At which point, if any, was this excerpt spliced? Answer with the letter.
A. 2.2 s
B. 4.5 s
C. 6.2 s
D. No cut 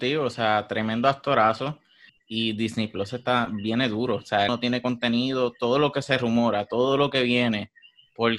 B